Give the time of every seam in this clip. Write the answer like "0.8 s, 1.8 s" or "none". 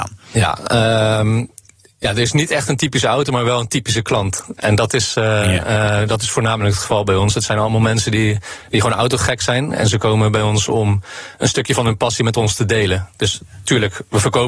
none